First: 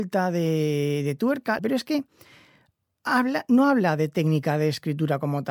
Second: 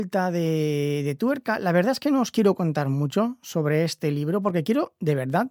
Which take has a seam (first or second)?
first